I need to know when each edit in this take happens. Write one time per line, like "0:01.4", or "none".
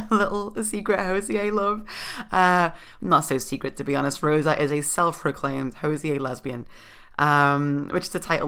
none